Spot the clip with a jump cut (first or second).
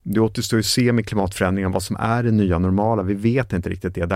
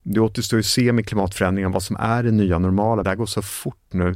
second